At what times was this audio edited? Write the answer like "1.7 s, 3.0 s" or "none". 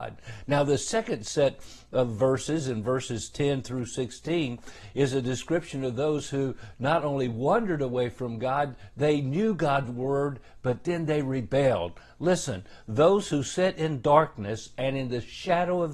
none